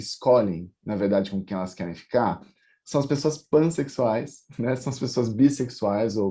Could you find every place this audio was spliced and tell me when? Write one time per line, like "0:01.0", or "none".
none